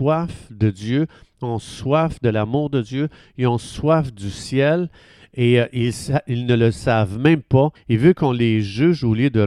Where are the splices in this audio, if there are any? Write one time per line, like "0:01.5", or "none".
0:07.7

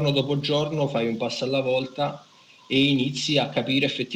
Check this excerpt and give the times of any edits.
none

